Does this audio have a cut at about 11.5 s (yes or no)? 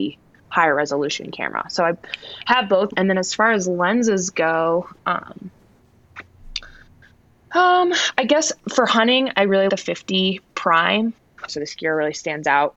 yes